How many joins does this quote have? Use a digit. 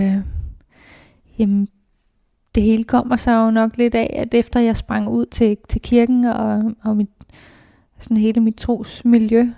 1